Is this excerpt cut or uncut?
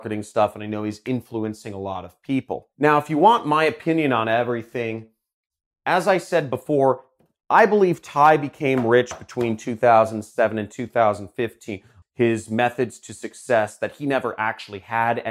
cut